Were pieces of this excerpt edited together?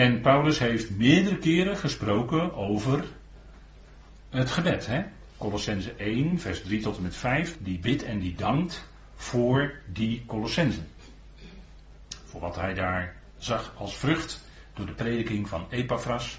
yes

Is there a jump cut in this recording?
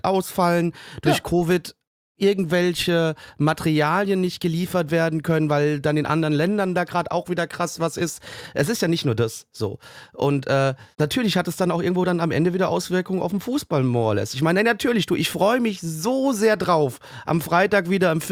yes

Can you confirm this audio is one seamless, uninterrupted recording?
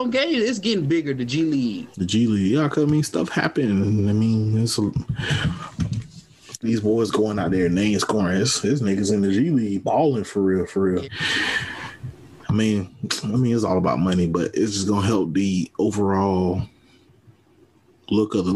no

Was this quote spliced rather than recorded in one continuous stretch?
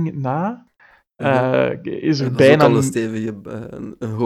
no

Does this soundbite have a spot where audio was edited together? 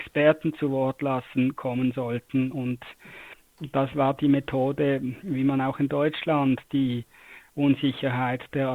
no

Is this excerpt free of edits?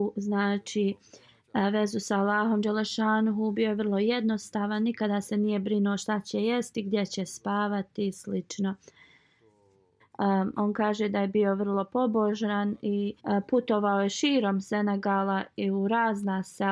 no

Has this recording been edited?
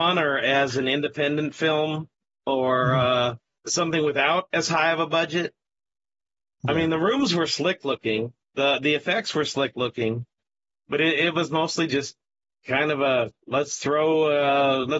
no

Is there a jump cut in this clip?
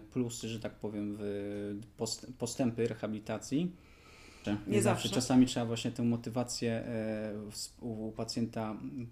yes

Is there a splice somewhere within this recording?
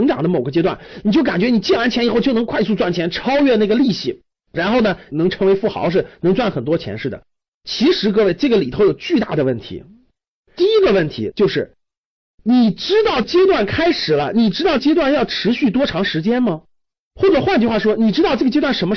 no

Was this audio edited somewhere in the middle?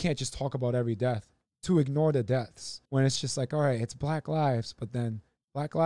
no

